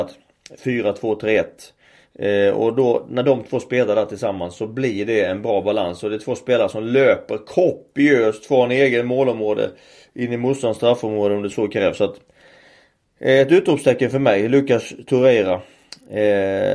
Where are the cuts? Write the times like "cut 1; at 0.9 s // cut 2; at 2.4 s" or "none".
cut 1; at 11.5 s